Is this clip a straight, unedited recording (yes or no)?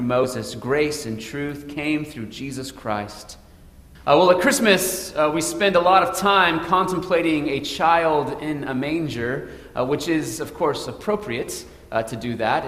no